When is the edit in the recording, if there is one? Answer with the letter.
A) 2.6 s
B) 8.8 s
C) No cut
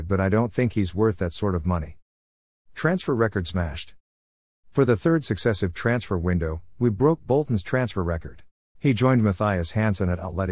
B